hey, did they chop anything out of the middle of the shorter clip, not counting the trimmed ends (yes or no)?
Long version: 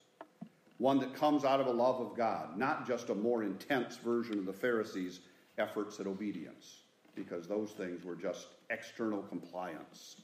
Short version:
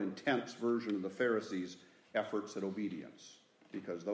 no